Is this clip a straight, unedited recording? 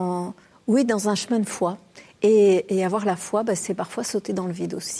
yes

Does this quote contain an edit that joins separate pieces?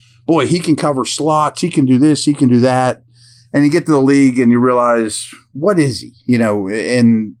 no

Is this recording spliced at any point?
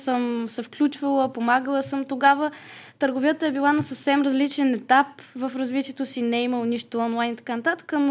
no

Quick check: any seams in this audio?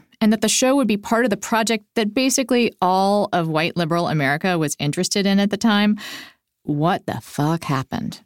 no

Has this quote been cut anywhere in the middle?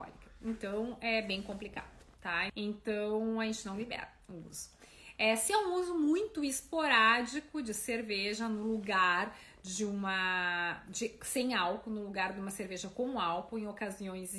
yes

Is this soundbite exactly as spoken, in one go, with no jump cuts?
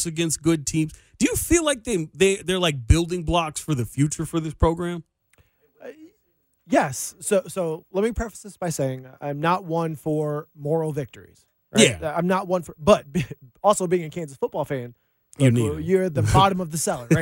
yes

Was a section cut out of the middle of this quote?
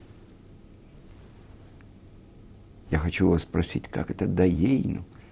no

